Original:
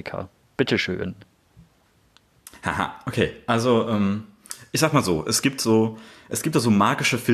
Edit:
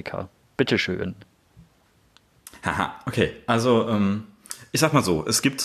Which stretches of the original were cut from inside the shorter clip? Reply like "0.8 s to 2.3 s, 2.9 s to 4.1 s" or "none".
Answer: none